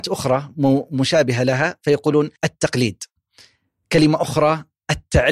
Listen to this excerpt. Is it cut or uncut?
cut